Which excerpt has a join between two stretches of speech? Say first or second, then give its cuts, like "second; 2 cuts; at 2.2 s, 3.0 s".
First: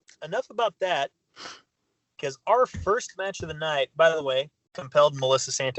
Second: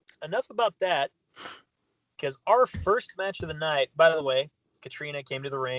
first; 1 cut; at 4.7 s